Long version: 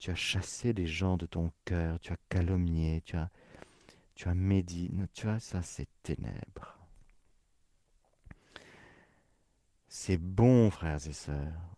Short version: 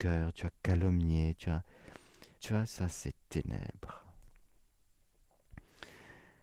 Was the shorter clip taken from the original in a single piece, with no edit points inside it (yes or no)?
no